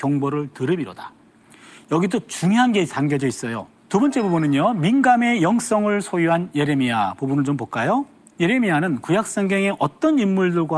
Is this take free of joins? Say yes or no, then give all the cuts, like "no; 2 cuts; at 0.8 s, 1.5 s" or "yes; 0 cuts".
no; 1 cut; at 3.8 s